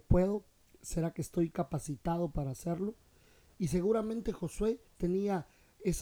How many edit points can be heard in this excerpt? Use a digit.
1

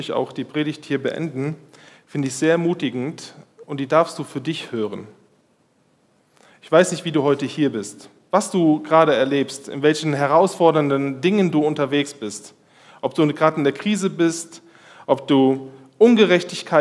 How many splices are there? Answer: 0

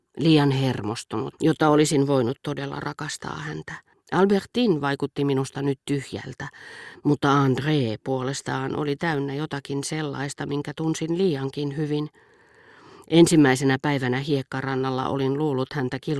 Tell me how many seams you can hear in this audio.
2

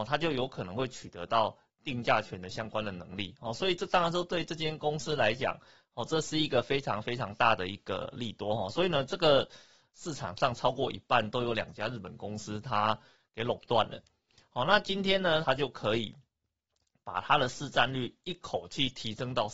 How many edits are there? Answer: 2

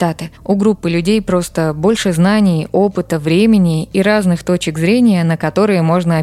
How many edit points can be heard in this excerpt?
0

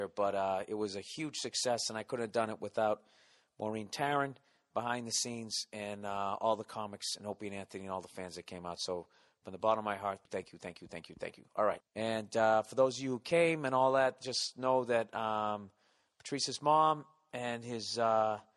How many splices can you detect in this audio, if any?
2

